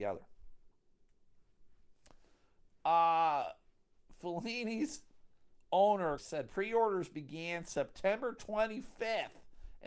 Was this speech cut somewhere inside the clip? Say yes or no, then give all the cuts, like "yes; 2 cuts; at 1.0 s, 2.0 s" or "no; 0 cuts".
yes; 1 cut; at 6.2 s